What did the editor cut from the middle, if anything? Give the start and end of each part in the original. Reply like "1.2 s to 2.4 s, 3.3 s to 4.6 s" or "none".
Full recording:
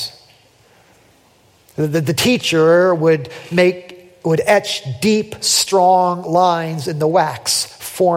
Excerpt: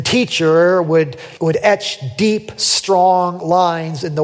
3.5 s to 4.2 s